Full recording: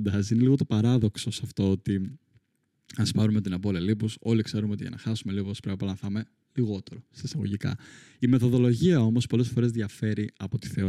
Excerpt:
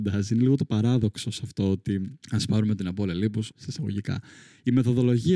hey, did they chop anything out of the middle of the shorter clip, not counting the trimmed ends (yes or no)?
yes